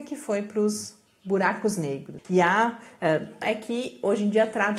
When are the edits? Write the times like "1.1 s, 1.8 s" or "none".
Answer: 2.2 s, 3.4 s